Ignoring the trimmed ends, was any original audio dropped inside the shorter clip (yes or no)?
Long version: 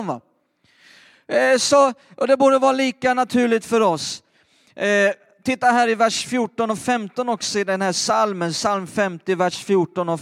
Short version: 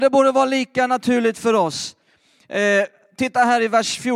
no